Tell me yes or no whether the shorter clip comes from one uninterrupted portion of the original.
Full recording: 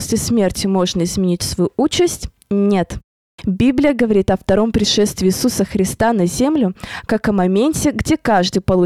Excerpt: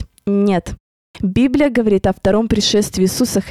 yes